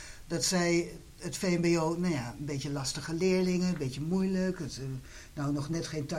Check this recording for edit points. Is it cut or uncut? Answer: uncut